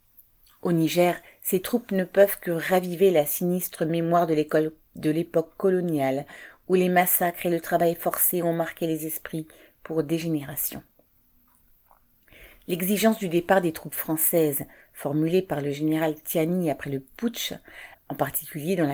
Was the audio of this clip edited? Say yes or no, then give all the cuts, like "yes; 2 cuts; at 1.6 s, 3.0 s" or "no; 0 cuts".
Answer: yes; 1 cut; at 17.9 s